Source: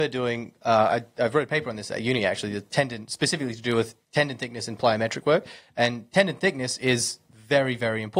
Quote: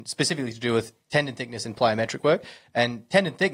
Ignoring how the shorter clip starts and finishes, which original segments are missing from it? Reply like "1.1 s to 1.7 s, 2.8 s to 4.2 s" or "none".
none